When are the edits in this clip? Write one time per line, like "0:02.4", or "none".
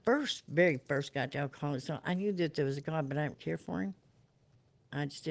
0:03.3